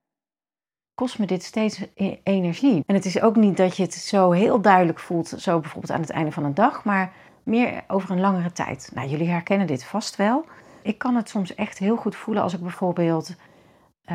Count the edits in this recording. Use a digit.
2